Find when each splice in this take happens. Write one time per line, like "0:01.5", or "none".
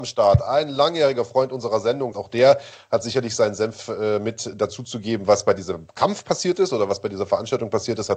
0:02.1